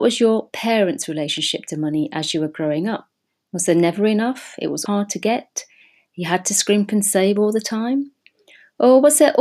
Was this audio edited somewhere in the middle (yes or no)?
yes